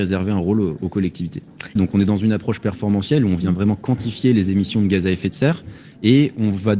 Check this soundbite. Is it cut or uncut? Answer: cut